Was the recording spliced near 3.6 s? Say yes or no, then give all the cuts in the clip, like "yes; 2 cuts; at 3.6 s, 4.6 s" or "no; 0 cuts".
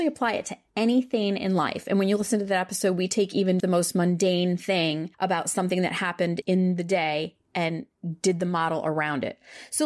yes; 2 cuts; at 3.6 s, 5.1 s